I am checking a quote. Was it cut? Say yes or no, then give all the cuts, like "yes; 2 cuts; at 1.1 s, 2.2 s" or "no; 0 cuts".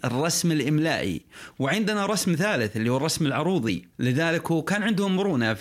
yes; 1 cut; at 3.9 s